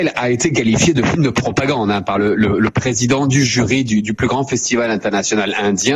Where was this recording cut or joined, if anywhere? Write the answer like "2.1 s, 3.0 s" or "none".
none